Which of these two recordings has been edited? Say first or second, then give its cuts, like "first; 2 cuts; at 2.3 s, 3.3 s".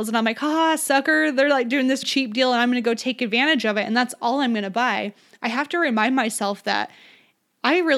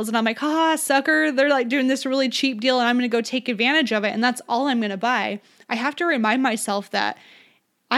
first; 1 cut; at 2.0 s